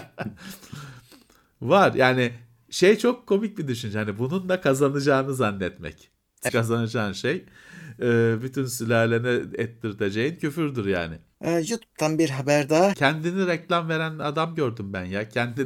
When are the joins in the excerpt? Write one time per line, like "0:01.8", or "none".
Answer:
0:06.5
0:11.3
0:12.9